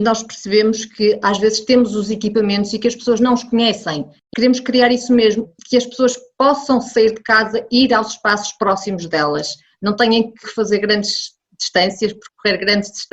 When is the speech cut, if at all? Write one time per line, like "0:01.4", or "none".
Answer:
none